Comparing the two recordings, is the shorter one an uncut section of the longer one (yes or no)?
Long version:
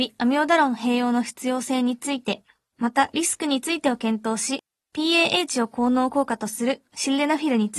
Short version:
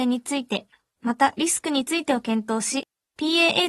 yes